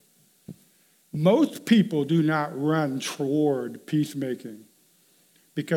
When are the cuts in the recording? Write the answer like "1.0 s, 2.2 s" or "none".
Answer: none